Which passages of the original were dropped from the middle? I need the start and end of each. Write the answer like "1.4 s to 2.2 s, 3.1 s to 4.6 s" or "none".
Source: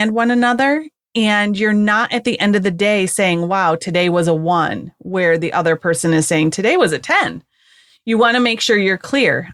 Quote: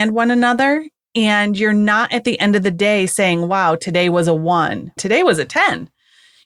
5.0 s to 6.5 s